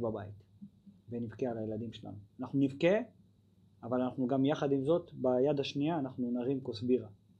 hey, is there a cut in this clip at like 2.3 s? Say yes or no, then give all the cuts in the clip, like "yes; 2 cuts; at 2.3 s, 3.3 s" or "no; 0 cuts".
no; 0 cuts